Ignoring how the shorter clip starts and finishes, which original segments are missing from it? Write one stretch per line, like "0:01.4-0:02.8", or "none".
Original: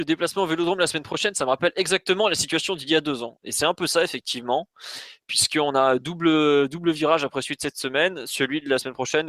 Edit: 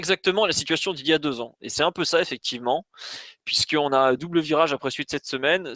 0:06.0-0:06.7